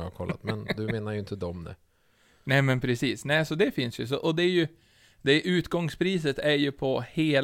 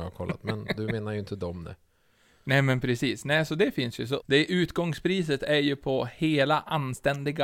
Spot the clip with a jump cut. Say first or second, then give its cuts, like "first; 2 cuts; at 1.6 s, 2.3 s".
second; 1 cut; at 4.2 s